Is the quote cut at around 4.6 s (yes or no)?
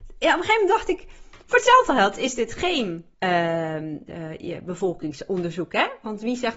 no